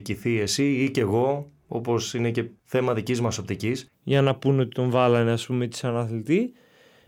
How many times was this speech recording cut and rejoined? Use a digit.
1